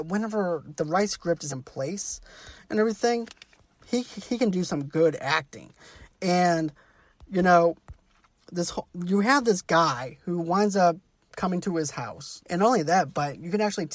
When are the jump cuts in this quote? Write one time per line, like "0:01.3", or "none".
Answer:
0:01.5
0:12.4